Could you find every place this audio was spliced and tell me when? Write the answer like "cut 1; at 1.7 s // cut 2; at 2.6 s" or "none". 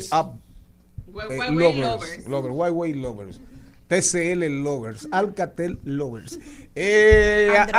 none